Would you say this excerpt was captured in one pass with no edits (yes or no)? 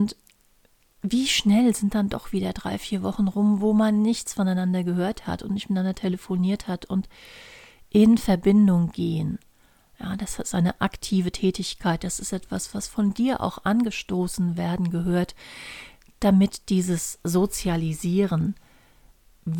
yes